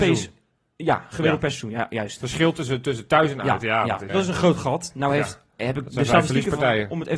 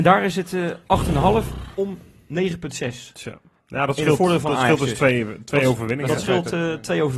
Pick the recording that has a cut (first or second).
first